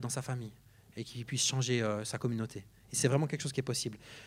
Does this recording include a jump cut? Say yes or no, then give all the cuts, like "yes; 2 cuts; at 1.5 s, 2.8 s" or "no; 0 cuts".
no; 0 cuts